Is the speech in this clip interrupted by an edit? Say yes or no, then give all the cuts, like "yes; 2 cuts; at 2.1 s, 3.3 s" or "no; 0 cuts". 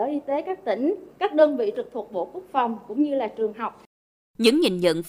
yes; 1 cut; at 1.1 s